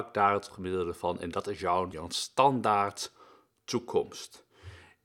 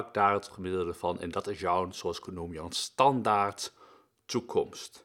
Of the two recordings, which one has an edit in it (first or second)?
first